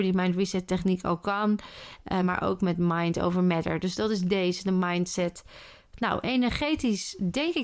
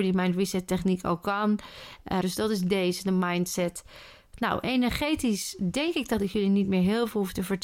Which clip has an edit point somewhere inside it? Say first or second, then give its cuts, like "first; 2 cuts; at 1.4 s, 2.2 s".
second; 1 cut; at 2.2 s